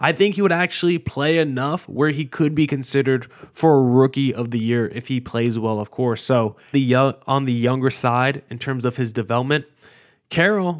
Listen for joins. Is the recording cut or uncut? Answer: cut